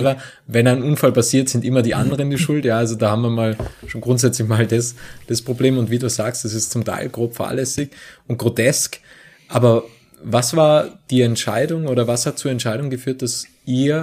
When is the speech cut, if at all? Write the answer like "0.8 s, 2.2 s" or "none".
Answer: none